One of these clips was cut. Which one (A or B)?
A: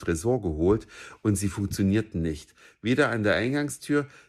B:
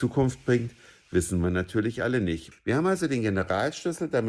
B